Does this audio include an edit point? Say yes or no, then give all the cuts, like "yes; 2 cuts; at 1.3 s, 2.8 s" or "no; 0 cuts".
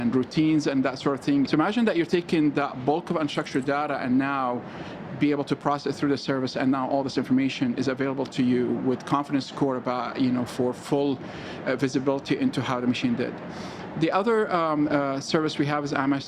yes; 1 cut; at 1.5 s